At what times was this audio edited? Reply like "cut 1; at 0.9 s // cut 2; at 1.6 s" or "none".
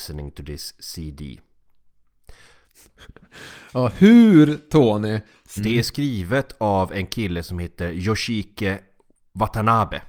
cut 1; at 2.6 s // cut 2; at 5.6 s